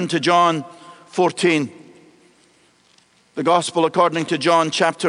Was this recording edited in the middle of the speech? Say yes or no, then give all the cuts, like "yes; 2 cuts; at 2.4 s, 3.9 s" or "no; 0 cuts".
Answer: no; 0 cuts